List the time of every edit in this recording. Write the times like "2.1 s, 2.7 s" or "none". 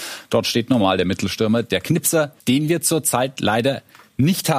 2.4 s

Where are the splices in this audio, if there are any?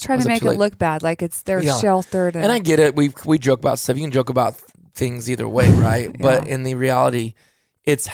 none

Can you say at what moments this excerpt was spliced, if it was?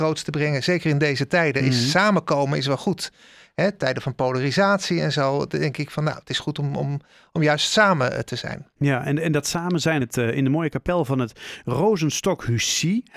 10.0 s

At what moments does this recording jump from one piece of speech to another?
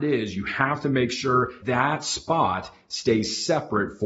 1.6 s

